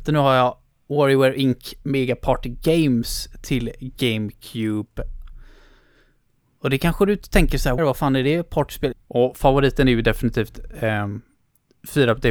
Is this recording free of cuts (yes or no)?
no